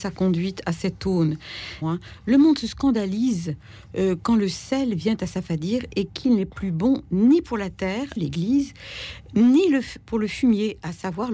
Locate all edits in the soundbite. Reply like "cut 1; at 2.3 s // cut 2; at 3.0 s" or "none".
cut 1; at 1.8 s // cut 2; at 8.2 s